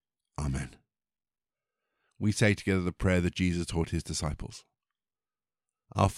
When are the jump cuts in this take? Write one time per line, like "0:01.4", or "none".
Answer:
none